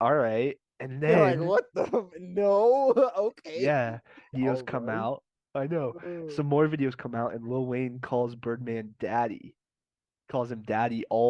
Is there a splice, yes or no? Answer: yes